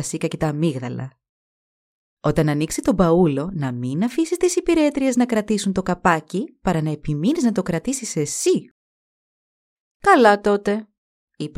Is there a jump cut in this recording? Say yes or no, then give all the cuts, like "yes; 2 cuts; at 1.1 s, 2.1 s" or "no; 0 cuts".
yes; 1 cut; at 9.9 s